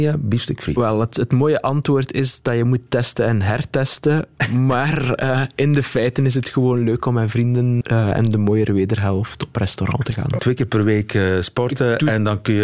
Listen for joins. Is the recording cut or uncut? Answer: cut